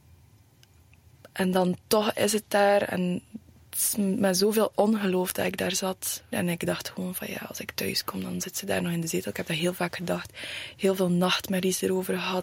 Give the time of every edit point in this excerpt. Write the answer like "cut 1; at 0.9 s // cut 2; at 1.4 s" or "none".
cut 1; at 6.3 s